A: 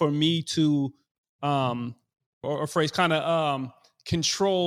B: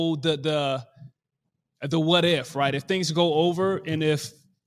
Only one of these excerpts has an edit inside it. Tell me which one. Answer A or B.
A